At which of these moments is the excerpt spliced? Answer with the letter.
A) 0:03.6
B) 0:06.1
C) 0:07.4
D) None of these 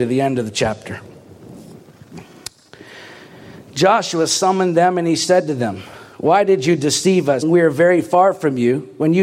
C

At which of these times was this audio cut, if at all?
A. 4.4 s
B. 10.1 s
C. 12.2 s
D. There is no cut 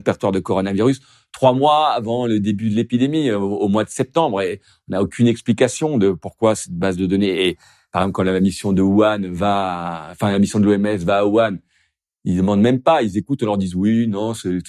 D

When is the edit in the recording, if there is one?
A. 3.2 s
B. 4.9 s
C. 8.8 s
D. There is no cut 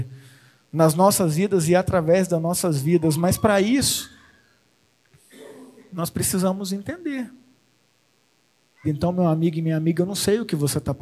C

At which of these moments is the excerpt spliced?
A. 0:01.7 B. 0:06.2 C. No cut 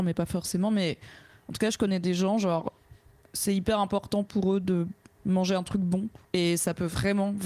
B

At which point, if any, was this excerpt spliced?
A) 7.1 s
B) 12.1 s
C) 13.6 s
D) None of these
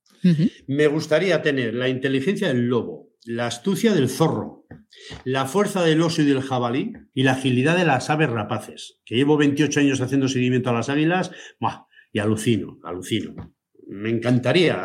A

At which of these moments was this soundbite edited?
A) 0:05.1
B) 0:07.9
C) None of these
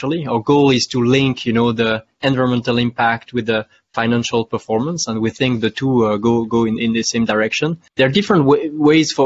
B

